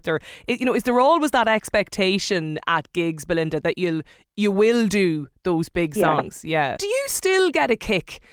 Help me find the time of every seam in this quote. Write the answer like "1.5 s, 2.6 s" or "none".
6.8 s